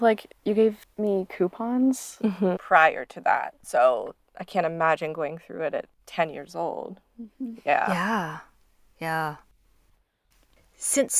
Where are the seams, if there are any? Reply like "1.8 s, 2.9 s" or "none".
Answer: 2.5 s